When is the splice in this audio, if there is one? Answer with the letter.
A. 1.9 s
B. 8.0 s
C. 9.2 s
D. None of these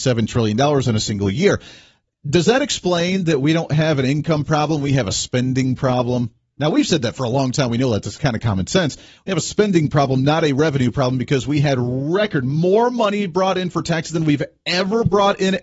D